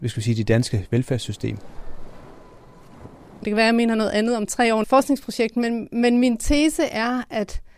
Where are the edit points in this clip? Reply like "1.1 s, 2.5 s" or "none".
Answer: 3.4 s, 4.8 s